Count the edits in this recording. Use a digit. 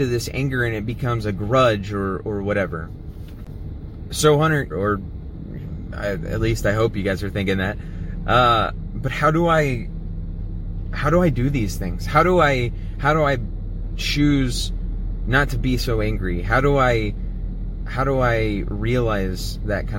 1